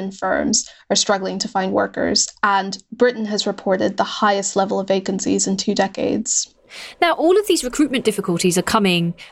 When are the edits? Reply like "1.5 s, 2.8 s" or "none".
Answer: none